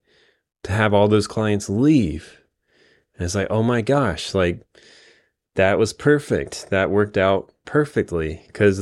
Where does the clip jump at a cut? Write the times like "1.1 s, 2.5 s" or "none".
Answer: none